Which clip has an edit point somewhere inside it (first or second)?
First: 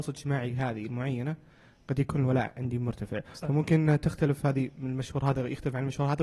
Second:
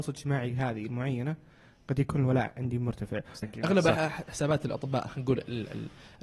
second